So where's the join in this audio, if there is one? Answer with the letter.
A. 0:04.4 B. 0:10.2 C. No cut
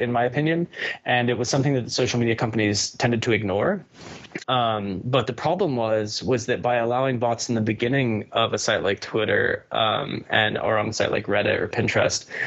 A